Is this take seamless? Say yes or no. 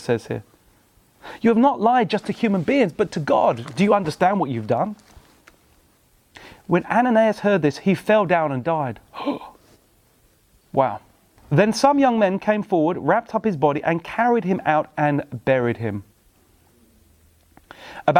no